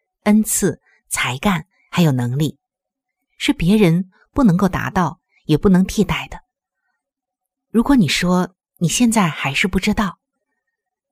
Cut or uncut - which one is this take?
uncut